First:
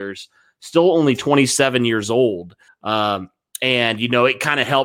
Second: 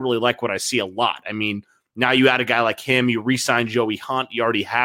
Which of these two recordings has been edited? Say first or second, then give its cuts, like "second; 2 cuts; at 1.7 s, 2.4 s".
first; 1 cut; at 2.7 s